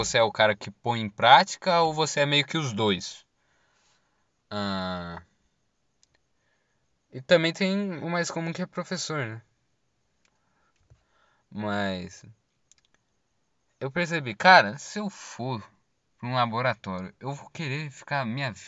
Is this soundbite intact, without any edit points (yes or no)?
yes